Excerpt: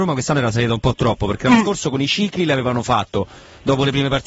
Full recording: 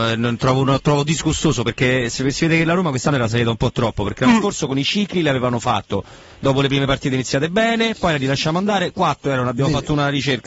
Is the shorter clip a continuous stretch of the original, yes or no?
yes